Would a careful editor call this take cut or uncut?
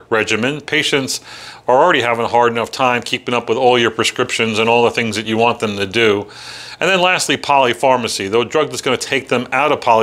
uncut